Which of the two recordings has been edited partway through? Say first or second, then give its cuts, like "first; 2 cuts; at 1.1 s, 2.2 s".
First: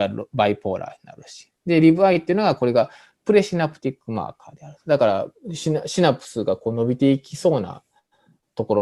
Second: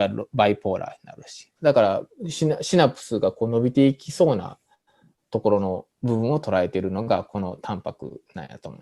second; 1 cut; at 1.6 s